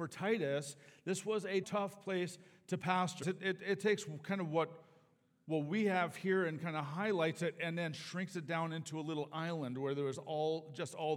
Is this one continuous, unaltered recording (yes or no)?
no